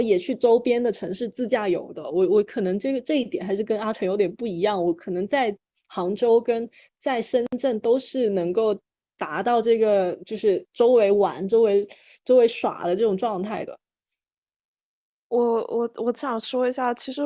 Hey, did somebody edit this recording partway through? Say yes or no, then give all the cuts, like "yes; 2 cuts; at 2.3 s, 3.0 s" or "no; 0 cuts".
no; 0 cuts